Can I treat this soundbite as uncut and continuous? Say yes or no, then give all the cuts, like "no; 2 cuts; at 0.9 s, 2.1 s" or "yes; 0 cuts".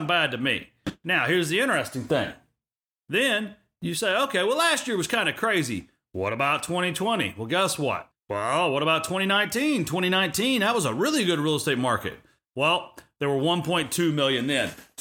no; 1 cut; at 8.1 s